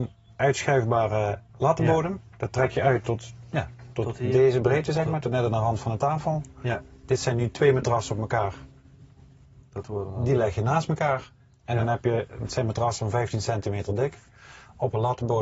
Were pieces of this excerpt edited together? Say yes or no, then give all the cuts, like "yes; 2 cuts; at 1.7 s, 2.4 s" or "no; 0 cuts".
no; 0 cuts